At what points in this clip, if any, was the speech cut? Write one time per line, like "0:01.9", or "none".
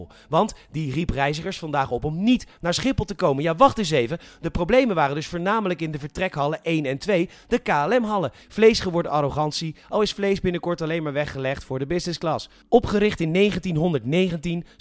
0:08.4